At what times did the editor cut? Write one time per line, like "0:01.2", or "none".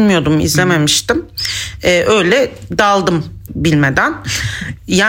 0:03.5